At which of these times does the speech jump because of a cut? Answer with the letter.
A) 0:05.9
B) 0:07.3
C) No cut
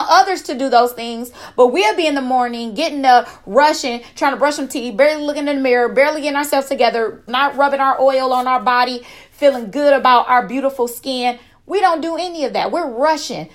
B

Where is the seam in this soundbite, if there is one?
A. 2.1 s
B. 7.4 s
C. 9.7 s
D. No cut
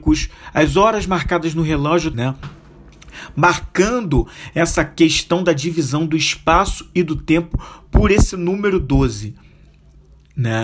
A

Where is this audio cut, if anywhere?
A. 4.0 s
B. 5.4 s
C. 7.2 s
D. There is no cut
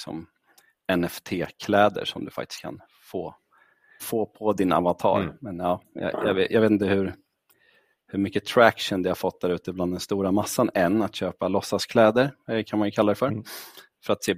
A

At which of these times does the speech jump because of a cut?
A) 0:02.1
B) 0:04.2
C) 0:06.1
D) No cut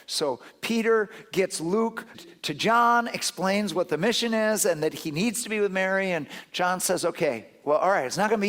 A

